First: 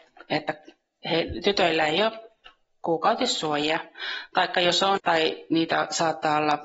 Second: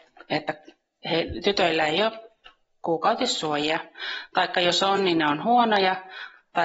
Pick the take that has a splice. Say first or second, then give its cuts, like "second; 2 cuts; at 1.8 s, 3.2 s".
first; 1 cut; at 5.0 s